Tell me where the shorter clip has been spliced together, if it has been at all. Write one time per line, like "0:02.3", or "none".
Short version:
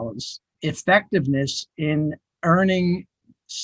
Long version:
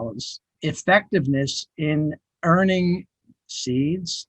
none